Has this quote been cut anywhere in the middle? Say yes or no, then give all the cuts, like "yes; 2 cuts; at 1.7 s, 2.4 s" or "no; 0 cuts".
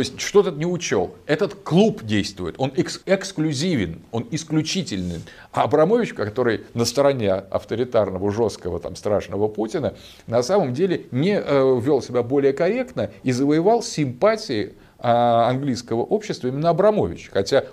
yes; 2 cuts; at 3.0 s, 5.4 s